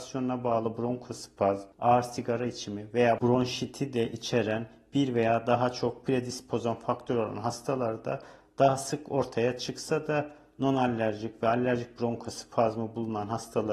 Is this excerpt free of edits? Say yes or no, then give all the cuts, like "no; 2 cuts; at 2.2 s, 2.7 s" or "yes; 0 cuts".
no; 1 cut; at 1.7 s